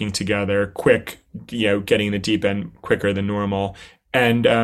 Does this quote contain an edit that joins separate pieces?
no; 0 cuts

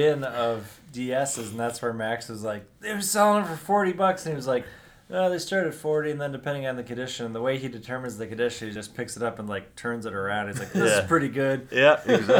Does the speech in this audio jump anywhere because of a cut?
no; 0 cuts

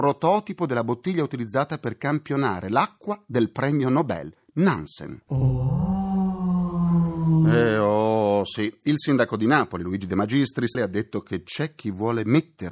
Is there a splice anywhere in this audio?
yes; 1 cut; at 10.7 s

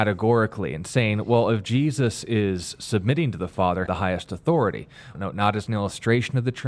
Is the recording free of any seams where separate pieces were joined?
no; 2 cuts; at 3.9 s, 5.1 s

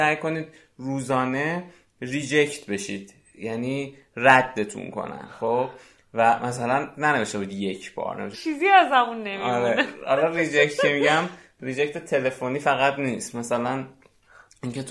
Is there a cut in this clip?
yes; 1 cut; at 8.3 s

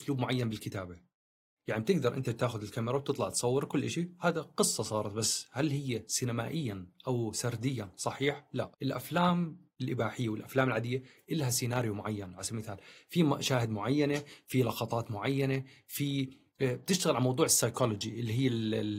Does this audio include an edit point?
yes; 1 cut; at 8.7 s

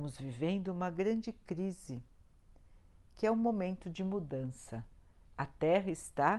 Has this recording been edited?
no; 0 cuts

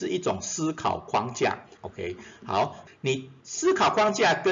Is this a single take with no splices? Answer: no; 2 cuts; at 1.8 s, 2.9 s

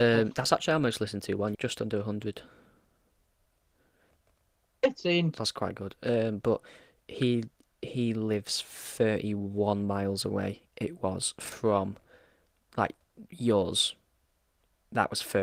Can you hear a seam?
yes; 1 cut; at 1.5 s

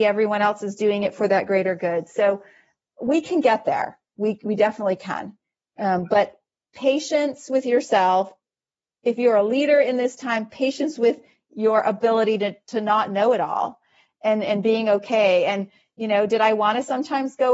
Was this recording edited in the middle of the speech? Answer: no; 0 cuts

